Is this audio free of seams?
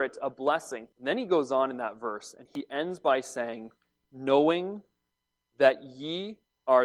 no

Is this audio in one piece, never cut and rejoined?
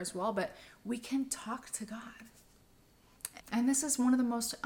no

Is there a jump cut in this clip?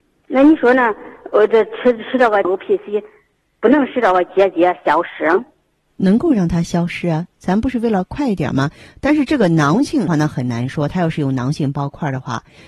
yes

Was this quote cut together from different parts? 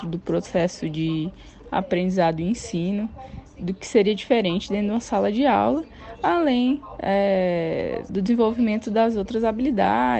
yes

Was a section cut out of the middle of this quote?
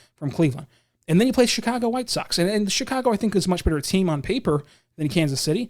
no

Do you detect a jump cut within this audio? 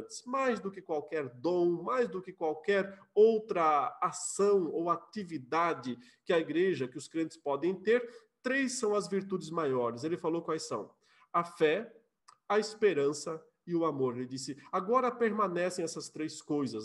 no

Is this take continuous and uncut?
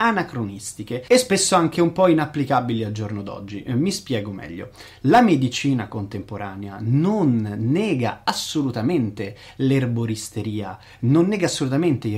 yes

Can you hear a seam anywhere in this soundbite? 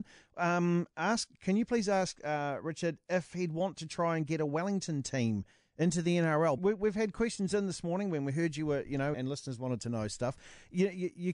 yes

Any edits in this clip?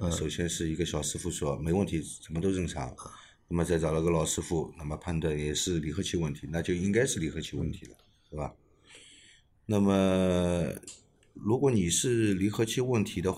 no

